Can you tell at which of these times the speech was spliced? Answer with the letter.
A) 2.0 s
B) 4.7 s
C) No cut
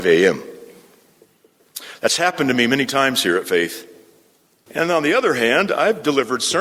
B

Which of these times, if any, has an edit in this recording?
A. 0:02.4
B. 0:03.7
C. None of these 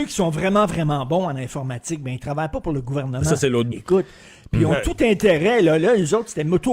B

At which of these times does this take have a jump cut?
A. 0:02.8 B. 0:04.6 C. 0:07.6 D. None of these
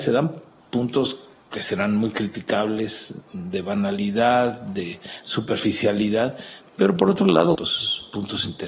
C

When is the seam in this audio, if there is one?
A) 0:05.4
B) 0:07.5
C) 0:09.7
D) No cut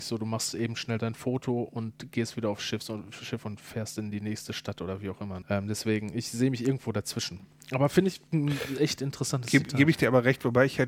A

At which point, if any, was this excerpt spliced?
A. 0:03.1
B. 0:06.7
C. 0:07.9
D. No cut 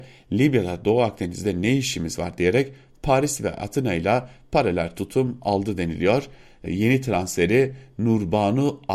B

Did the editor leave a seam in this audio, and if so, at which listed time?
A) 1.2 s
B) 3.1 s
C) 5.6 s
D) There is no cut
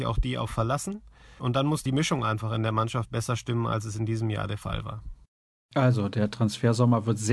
D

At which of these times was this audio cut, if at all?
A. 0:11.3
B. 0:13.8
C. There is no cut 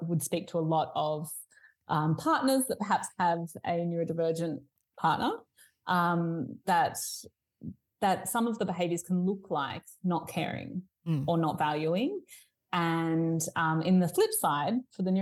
C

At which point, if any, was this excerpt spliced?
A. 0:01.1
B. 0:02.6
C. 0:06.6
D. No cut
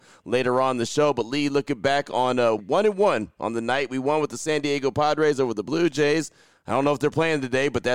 B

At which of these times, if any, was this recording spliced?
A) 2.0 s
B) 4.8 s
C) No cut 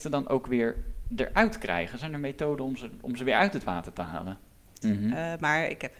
B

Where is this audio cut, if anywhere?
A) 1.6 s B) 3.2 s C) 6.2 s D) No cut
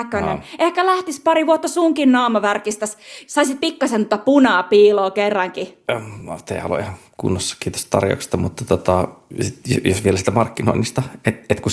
D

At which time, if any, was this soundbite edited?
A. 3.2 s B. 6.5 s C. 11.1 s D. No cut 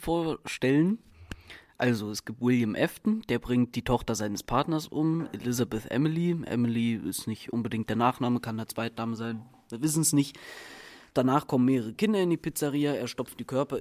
D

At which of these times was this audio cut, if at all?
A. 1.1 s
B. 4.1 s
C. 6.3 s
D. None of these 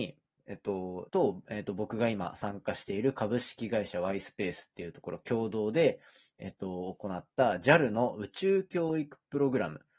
A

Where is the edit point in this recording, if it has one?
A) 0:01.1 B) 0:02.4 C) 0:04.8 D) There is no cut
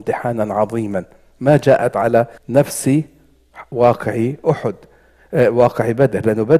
B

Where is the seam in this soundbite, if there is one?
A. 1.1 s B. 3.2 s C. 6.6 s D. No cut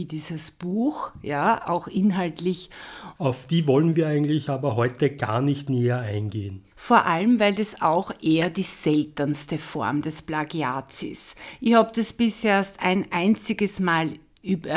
B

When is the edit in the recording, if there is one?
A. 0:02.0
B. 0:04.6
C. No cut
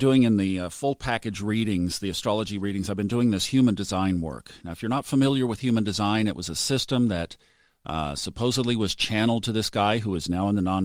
C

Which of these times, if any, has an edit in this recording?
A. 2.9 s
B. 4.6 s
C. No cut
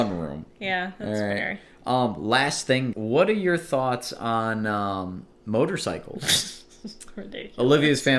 A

